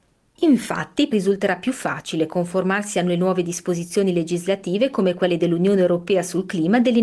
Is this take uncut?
no; 1 cut; at 1.1 s

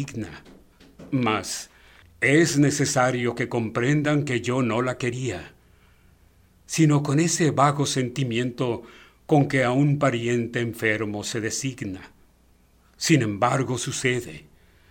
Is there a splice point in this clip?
yes; 1 cut; at 2.0 s

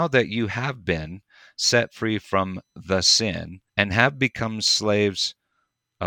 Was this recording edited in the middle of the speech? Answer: yes; 1 cut; at 3.7 s

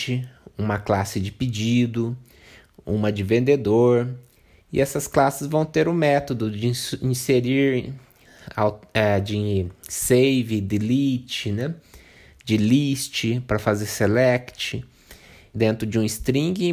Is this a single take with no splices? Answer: no; 1 cut; at 15.5 s

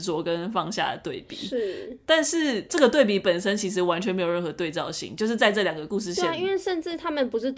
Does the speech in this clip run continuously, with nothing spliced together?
yes; 0 cuts

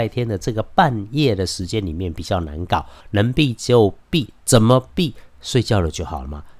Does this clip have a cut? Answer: no; 0 cuts

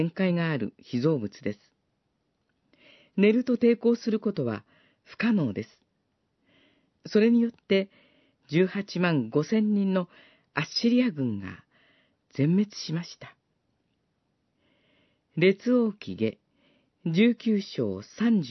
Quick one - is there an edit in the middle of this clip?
no; 0 cuts

